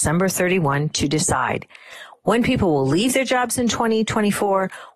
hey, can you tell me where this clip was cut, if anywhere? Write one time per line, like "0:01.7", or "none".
none

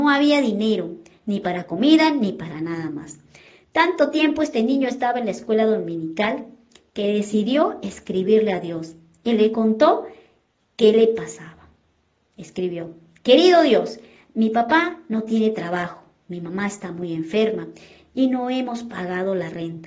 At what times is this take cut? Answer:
none

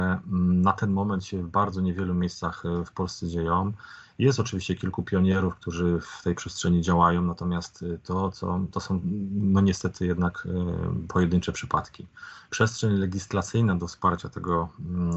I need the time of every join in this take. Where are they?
0:12.5

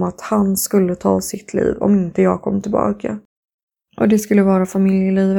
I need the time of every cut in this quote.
none

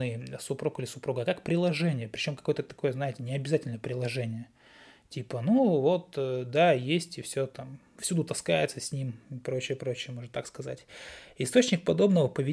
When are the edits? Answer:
none

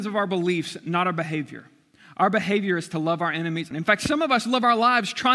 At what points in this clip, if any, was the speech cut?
0:03.7

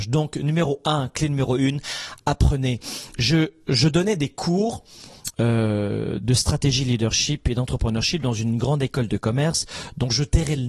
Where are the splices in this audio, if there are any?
none

